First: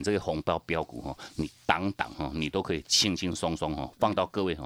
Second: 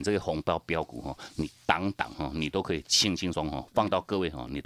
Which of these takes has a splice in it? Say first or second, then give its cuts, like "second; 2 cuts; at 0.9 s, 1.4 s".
second; 1 cut; at 3.3 s